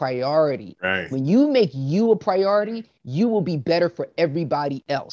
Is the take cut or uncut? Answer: uncut